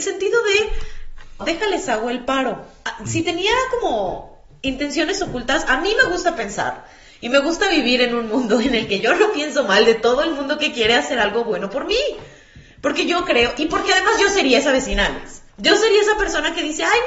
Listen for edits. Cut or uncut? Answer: cut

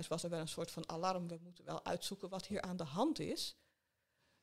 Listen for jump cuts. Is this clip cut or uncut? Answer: uncut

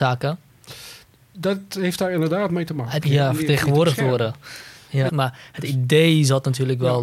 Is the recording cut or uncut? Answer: cut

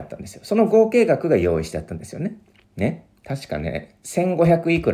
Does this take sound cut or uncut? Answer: cut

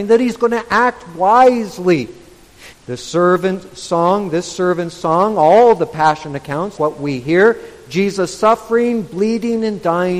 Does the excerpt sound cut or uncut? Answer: cut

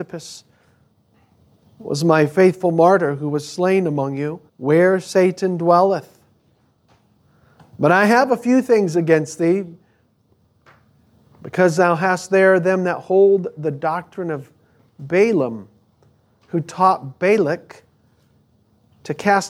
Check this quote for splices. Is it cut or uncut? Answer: cut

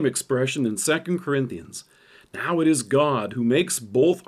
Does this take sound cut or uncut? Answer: uncut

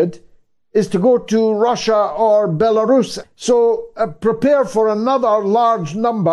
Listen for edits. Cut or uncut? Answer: cut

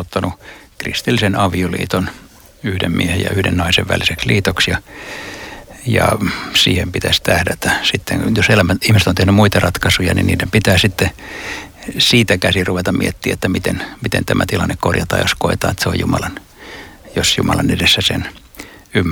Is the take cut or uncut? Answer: uncut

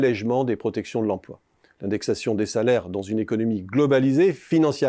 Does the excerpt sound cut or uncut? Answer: uncut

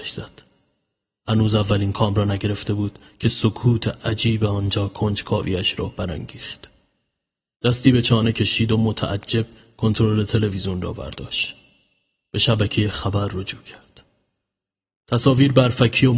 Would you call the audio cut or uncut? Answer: cut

